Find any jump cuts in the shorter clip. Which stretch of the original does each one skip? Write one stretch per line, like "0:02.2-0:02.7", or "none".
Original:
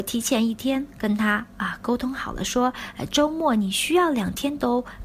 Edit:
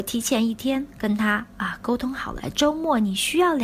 0:02.4-0:02.9